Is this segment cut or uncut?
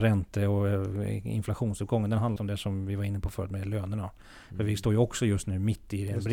cut